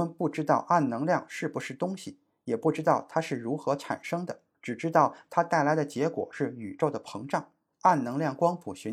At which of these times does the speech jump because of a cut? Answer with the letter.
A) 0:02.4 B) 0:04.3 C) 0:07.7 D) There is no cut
C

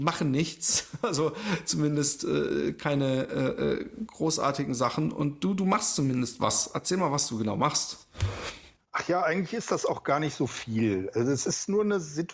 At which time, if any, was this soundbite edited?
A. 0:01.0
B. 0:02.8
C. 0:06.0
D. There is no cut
D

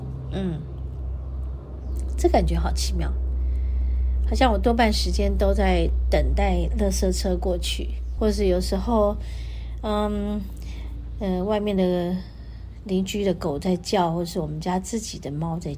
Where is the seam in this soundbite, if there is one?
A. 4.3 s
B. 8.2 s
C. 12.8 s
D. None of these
B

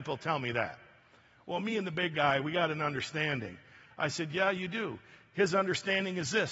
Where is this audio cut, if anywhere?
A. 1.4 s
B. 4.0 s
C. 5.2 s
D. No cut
D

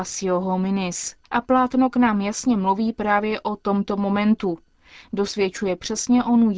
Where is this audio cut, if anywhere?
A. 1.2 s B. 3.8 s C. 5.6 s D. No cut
A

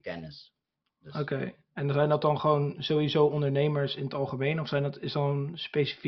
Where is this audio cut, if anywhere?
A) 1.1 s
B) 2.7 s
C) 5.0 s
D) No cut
D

